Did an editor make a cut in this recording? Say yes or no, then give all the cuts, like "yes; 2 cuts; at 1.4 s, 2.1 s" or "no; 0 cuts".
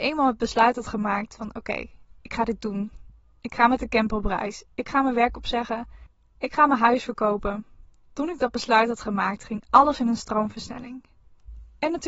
no; 0 cuts